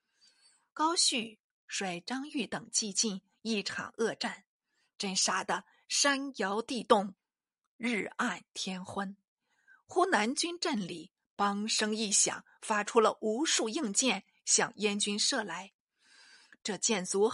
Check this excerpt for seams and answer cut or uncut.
uncut